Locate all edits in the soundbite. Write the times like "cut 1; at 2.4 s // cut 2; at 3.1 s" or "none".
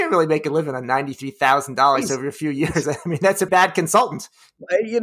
cut 1; at 3.5 s